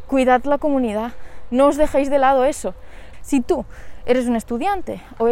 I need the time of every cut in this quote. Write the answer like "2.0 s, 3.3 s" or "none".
3.1 s